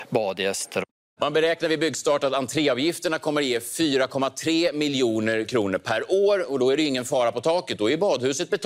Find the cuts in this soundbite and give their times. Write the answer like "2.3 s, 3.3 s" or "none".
none